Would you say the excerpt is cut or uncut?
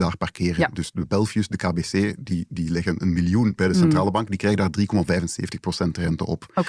uncut